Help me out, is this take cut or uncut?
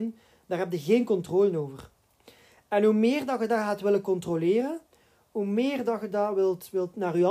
uncut